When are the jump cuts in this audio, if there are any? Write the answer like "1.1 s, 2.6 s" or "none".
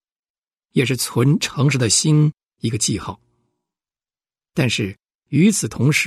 none